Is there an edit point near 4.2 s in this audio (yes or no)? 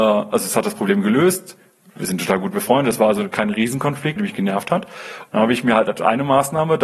yes